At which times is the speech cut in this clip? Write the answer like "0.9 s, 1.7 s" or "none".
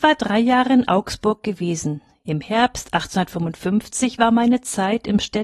none